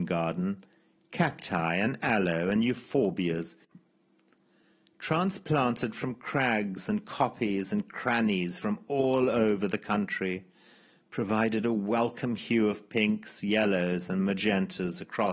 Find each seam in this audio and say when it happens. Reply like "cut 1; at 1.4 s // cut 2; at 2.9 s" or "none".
none